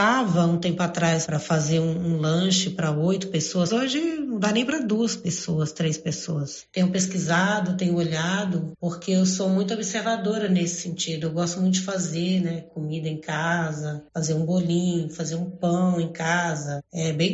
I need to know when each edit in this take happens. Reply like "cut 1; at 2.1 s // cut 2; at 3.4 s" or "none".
cut 1; at 3.7 s